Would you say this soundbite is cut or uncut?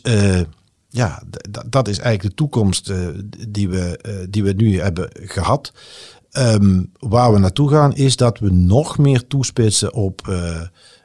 uncut